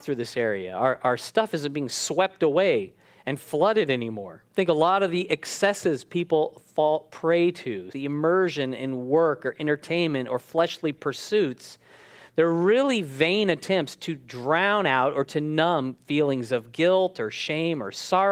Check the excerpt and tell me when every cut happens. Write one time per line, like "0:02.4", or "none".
0:04.5
0:07.9